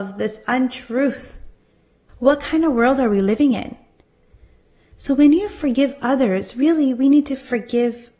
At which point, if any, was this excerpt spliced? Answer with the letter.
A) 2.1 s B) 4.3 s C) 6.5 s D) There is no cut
A